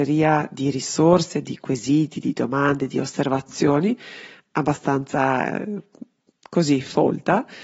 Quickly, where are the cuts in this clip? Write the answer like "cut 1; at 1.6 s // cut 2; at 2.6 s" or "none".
none